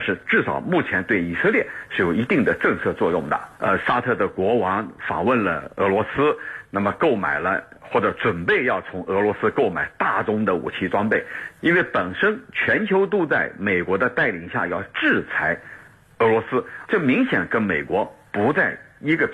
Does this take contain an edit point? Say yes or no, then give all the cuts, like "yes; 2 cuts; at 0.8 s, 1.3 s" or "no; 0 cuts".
yes; 3 cuts; at 3.6 s, 11.6 s, 16.9 s